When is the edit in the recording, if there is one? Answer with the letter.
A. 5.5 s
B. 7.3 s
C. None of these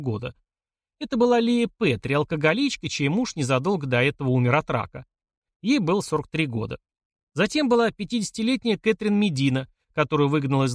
C